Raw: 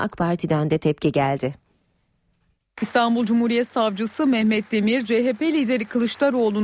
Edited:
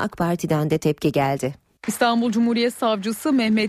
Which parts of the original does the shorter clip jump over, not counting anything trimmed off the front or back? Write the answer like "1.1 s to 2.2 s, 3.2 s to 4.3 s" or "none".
1.8 s to 2.7 s